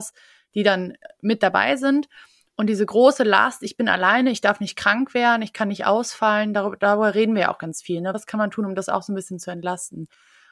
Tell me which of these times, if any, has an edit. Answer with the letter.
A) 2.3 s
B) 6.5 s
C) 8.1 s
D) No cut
D